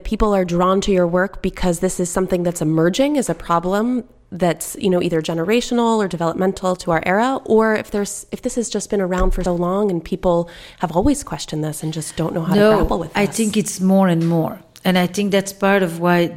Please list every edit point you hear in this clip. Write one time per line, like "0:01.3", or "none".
0:09.5